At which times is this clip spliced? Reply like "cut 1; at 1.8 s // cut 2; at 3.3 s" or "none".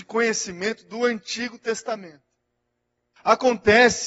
cut 1; at 3.2 s